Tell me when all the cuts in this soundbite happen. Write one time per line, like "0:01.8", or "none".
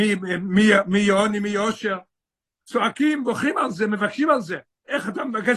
none